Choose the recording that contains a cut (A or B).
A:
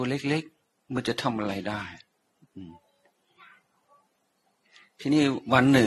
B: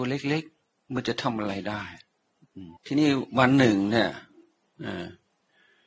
B